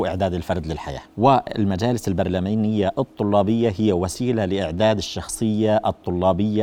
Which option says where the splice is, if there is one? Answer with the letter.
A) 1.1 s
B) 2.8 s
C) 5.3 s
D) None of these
A